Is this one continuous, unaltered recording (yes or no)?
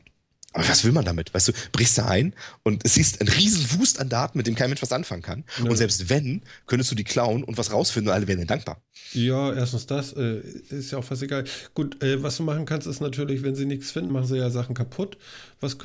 no